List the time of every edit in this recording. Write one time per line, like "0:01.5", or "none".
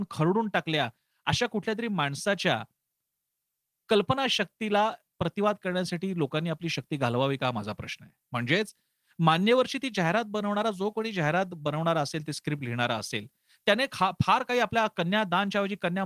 none